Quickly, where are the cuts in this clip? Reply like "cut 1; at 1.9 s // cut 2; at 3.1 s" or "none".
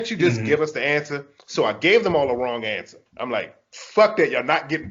cut 1; at 3.1 s